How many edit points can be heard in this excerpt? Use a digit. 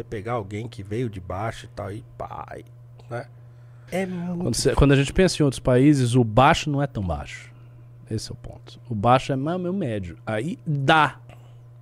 1